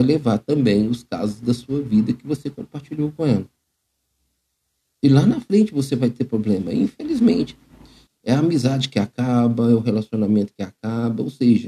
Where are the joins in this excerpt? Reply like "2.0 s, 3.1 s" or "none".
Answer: 8.1 s